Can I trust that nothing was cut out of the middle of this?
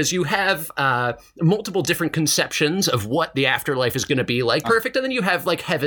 no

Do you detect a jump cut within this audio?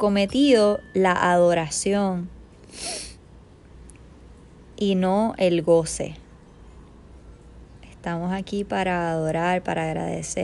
no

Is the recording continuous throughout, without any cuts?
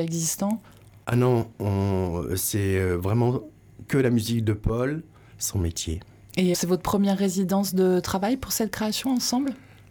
no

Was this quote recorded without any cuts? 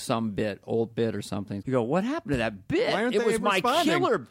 no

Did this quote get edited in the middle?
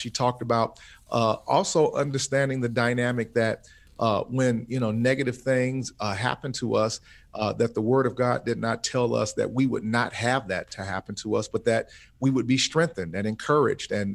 no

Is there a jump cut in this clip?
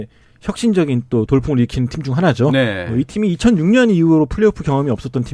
no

